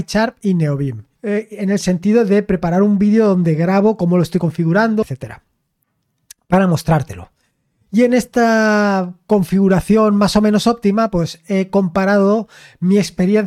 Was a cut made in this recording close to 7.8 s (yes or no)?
no